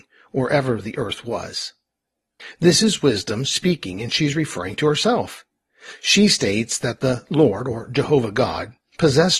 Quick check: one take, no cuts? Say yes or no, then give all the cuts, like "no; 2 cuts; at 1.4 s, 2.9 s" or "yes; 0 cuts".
yes; 0 cuts